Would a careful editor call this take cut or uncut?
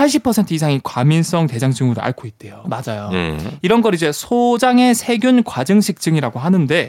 cut